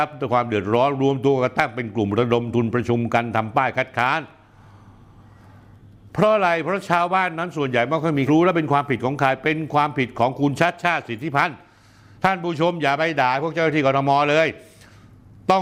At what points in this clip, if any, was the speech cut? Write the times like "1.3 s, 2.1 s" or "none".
8.3 s